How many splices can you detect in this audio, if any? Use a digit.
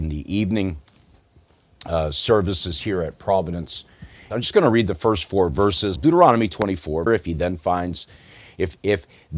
3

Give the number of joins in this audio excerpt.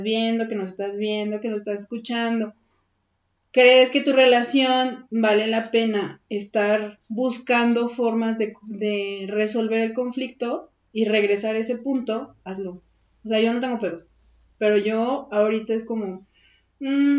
0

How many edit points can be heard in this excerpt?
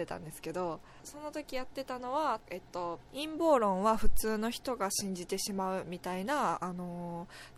0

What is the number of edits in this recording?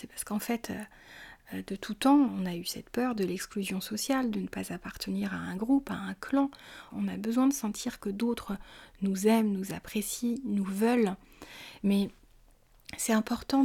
3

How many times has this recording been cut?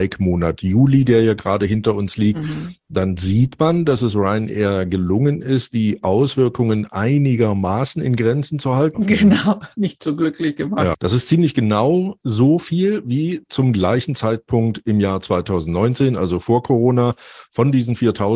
2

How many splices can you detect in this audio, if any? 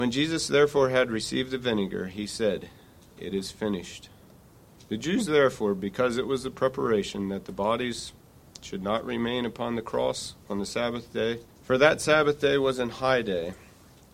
2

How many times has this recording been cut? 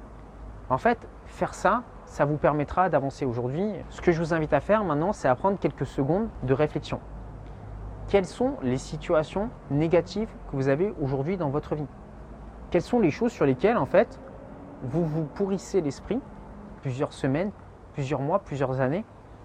2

